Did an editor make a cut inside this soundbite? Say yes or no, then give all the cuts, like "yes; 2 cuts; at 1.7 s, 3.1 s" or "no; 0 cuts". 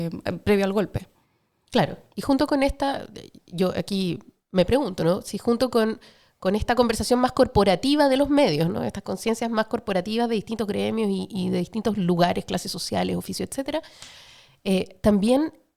no; 0 cuts